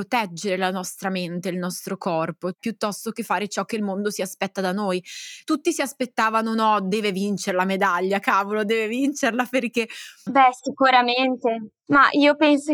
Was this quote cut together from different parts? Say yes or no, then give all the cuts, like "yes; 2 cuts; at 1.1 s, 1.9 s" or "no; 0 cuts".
yes; 1 cut; at 10.3 s